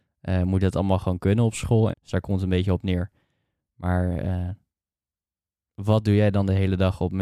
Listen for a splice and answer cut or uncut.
cut